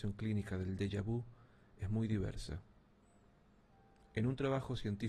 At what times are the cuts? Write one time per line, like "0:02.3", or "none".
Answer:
none